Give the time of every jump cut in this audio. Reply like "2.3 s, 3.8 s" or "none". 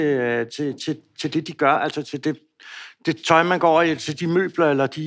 none